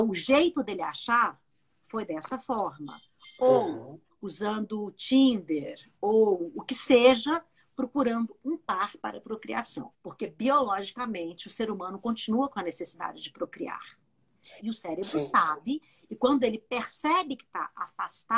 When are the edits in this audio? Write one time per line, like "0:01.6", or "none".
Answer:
0:09.9
0:14.6